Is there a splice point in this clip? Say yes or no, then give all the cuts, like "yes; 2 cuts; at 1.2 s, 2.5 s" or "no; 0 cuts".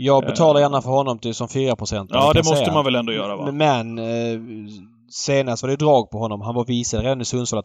no; 0 cuts